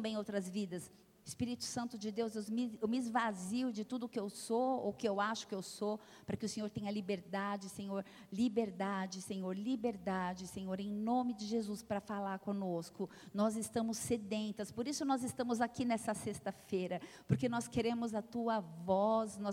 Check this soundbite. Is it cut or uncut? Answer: cut